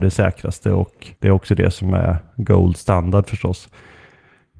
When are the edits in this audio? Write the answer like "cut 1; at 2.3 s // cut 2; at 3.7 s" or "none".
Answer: cut 1; at 1.2 s